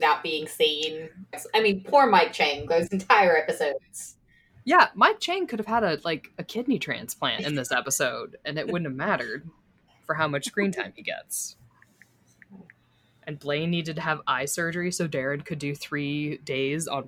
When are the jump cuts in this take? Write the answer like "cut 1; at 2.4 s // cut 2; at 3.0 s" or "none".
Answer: cut 1; at 1.3 s